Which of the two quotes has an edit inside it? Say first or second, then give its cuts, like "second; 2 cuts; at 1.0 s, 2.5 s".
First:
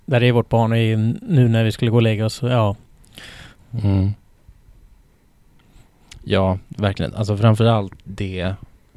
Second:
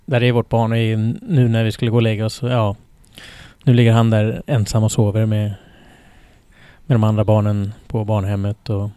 first; 1 cut; at 3.6 s